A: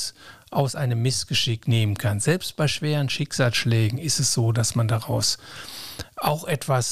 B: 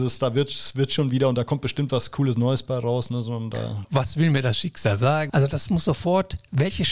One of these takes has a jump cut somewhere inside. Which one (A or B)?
B